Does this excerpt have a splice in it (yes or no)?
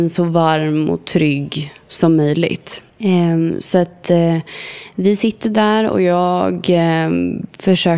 yes